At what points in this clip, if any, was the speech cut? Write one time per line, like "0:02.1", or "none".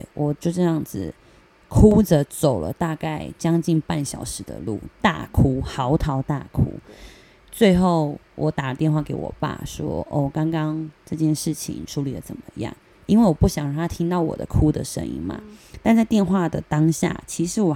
none